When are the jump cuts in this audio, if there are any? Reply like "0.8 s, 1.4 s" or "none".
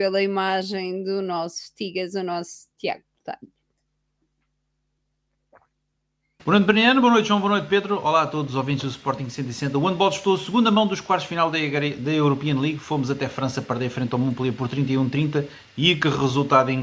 none